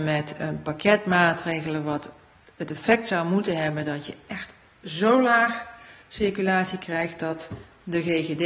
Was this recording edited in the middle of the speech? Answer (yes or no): no